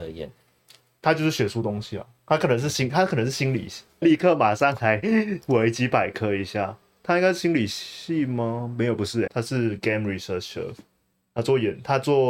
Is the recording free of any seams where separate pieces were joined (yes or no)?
no